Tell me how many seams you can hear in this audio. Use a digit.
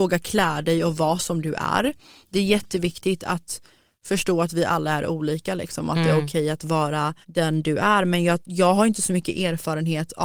1